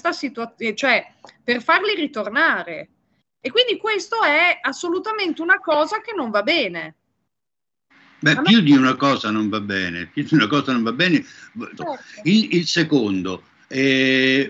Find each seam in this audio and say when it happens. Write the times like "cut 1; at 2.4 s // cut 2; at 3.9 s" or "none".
cut 1; at 11.8 s

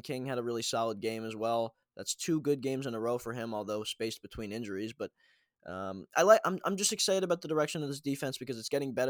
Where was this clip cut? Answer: none

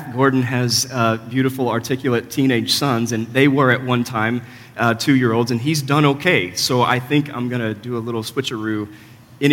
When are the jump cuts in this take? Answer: none

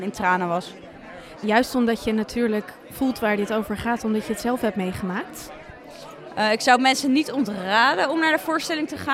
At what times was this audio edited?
cut 1; at 1.4 s

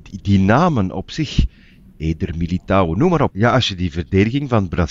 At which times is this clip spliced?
cut 1; at 3.3 s

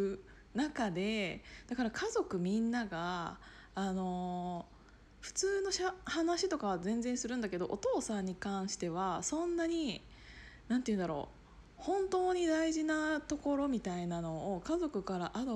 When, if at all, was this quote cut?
none

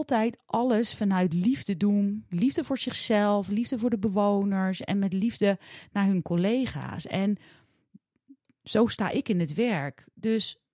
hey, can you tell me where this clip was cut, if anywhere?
none

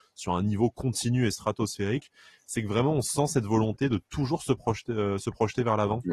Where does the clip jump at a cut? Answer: none

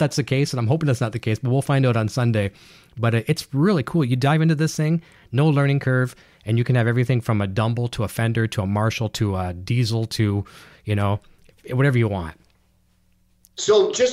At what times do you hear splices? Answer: none

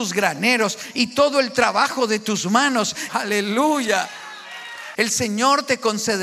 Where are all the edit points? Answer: cut 1; at 3.1 s // cut 2; at 4.9 s

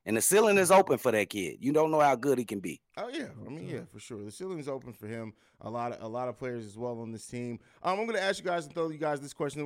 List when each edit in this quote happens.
none

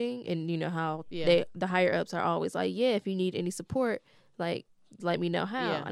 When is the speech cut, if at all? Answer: cut 1; at 5.0 s

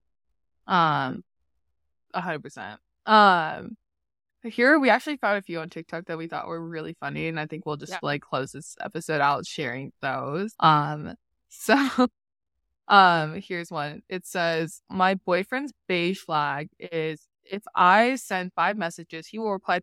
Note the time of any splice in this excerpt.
cut 1; at 10.5 s

